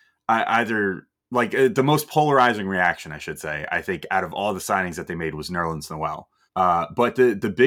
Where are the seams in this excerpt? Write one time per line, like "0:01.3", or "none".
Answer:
0:06.5